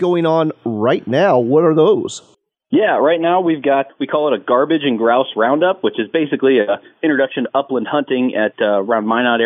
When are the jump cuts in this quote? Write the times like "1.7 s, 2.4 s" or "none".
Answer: none